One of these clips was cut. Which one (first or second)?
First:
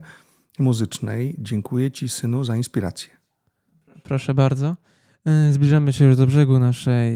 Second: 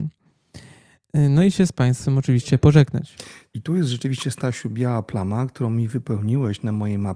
second